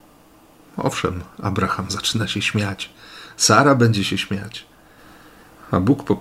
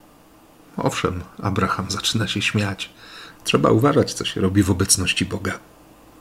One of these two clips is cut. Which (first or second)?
second